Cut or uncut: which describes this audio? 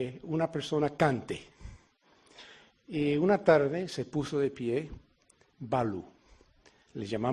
uncut